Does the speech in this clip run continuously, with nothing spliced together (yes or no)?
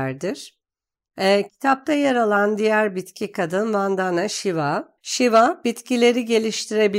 no